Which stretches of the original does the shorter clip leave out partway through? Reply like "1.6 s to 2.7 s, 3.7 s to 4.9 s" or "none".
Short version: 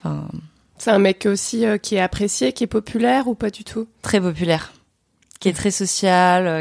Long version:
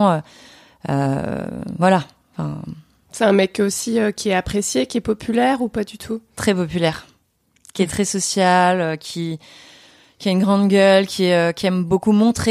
none